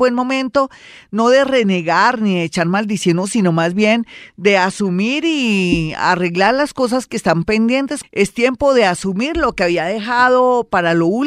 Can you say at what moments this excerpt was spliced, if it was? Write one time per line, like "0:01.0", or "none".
0:08.0